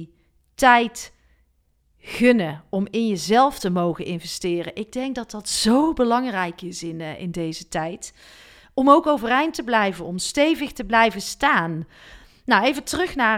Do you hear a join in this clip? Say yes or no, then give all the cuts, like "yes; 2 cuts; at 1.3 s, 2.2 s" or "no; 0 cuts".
no; 0 cuts